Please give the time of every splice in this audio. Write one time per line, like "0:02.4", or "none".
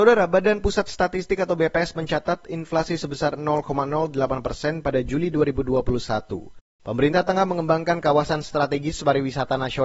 0:06.8